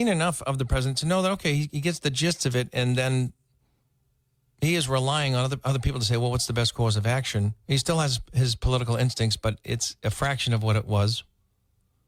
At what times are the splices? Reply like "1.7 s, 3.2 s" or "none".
none